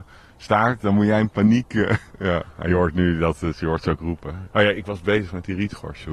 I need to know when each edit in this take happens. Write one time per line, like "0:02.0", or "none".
0:02.1
0:04.5